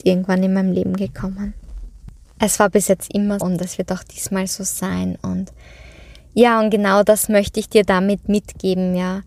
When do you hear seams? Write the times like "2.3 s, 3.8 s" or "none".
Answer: 3.4 s